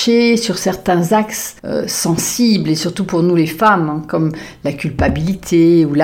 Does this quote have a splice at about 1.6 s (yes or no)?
yes